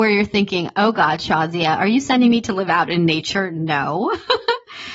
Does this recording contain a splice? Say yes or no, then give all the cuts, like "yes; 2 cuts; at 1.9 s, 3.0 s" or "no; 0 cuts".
no; 0 cuts